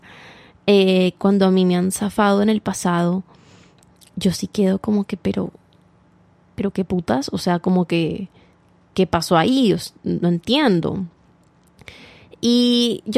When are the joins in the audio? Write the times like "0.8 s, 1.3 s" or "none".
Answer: none